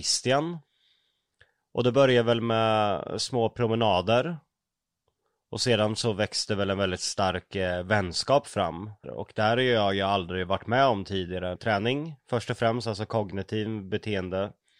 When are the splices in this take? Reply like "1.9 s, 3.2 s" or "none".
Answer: 9.0 s, 11.6 s